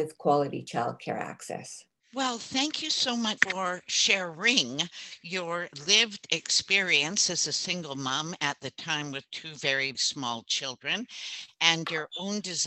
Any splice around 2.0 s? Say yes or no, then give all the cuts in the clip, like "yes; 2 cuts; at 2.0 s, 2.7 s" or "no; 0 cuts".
yes; 3 cuts; at 2.0 s, 3.4 s, 9.9 s